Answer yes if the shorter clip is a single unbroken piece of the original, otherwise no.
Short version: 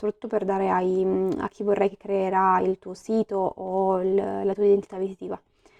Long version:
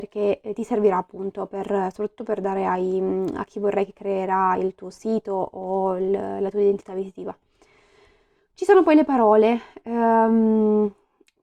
yes